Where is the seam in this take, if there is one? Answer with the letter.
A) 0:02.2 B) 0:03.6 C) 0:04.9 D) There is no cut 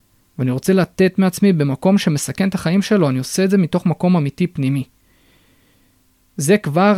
D